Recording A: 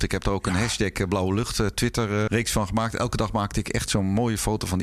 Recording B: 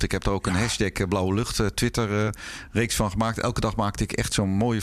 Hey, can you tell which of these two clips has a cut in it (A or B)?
A